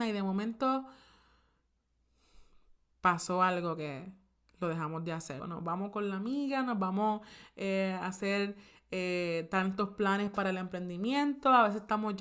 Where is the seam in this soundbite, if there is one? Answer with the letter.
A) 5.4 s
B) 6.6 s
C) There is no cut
A